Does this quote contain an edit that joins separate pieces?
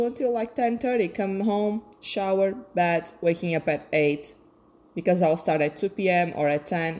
no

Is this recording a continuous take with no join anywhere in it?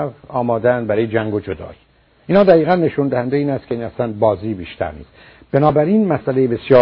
yes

